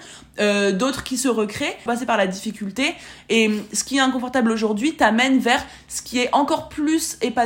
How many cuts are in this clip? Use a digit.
1